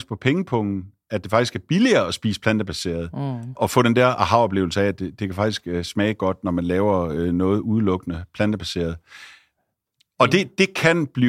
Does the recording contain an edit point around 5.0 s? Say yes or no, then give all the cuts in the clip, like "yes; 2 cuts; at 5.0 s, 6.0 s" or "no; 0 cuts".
no; 1 cut; at 3.6 s